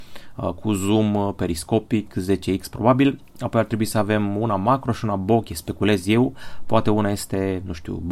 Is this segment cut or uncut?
uncut